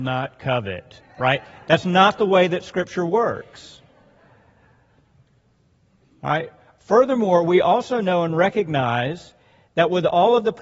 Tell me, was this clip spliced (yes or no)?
no